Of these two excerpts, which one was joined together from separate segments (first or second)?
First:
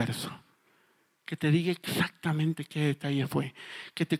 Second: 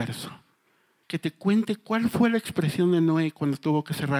second